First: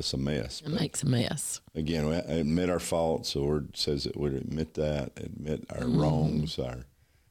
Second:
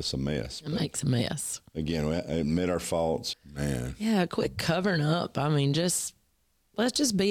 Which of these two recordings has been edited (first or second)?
second